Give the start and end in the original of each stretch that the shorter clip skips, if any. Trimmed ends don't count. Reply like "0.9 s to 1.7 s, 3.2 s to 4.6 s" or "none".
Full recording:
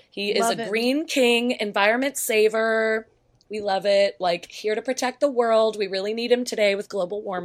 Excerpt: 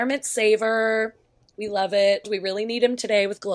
4.2 s to 5.7 s